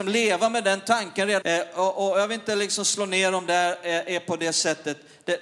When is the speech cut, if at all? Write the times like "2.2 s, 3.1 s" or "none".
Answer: 1.4 s